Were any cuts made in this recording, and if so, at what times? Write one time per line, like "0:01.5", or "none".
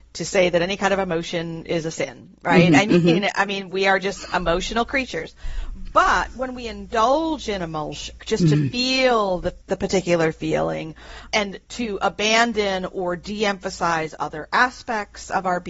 0:08.2
0:09.6
0:11.3